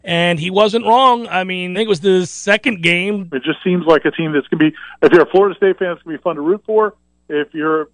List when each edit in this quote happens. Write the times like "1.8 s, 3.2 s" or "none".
1.7 s, 3.3 s